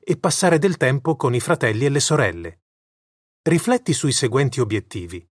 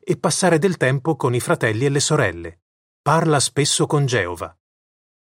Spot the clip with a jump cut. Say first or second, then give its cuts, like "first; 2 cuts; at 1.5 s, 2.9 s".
second; 1 cut; at 2.8 s